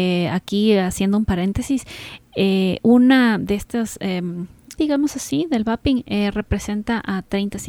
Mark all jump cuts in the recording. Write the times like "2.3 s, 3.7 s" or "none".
4.8 s